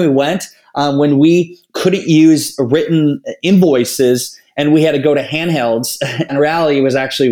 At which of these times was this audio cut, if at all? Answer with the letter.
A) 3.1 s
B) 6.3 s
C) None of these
B